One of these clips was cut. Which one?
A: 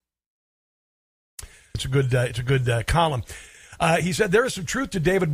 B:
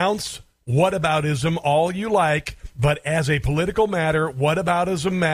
A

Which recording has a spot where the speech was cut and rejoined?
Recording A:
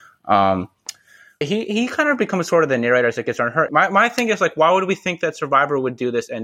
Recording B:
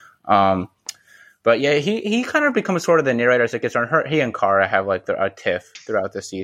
A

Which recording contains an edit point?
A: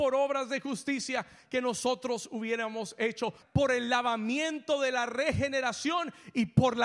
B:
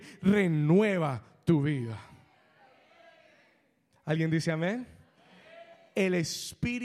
A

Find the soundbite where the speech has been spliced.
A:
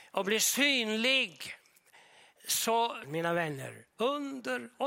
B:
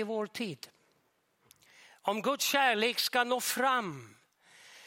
A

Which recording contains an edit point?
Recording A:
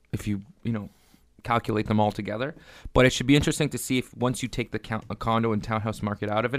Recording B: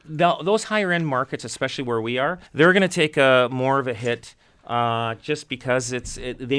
B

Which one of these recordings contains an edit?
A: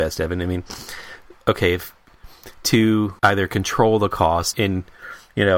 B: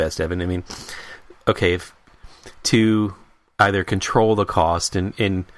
A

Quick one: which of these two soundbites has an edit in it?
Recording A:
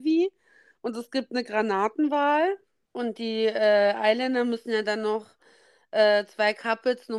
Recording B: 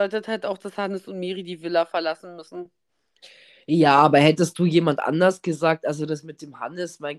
A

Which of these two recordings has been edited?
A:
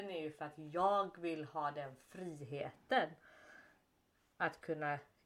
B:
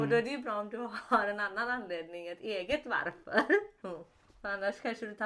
B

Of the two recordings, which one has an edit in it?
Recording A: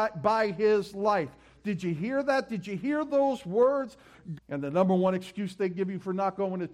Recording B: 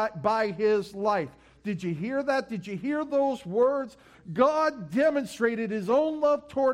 A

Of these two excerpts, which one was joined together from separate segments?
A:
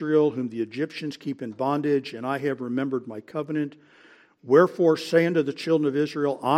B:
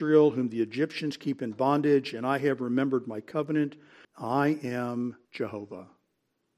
B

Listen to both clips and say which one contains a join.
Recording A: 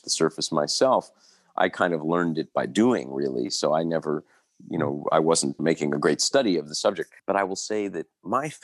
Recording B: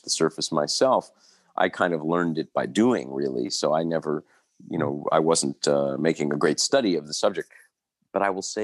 A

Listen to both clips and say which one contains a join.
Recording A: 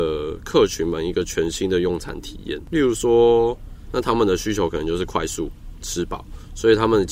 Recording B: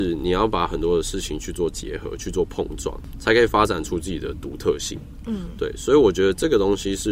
A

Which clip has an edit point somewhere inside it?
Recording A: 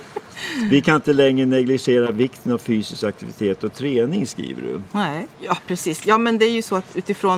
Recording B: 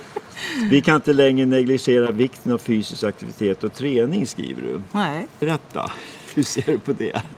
A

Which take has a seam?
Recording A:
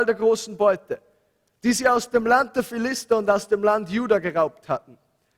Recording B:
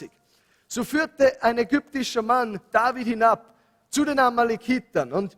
B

